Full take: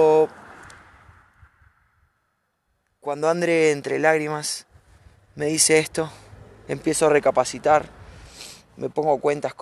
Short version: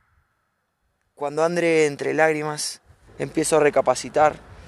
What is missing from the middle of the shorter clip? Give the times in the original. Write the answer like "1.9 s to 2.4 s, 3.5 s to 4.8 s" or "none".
4.9 s to 6.6 s